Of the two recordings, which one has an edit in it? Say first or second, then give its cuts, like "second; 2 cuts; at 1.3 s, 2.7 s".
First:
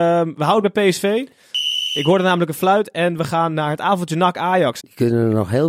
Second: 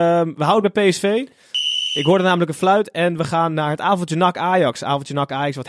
first; 1 cut; at 4.8 s